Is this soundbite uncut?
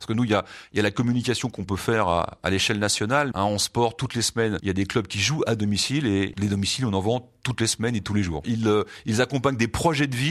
no; 3 cuts; at 3.3 s, 6.3 s, 8.4 s

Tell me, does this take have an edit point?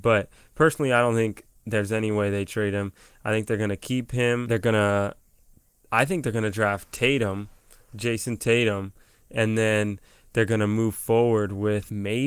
no; 0 cuts

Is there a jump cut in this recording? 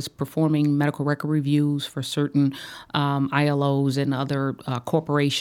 no; 0 cuts

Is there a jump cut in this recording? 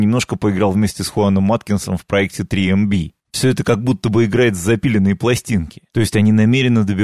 yes; 1 cut; at 3.2 s

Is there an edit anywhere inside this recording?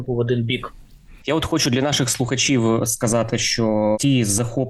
no; 0 cuts

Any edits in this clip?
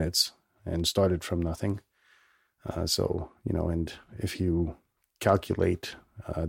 no; 0 cuts

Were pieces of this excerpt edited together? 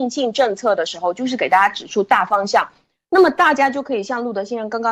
no; 0 cuts

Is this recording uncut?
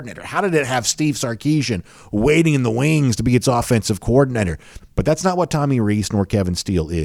no; 1 cut; at 4.8 s

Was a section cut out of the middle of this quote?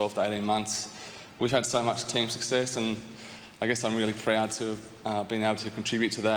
no; 0 cuts

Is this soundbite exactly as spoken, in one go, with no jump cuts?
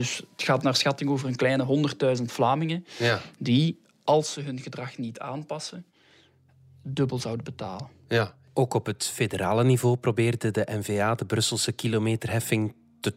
yes; 0 cuts

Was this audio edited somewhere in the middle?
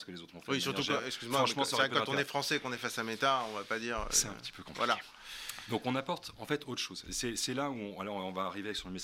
no; 0 cuts

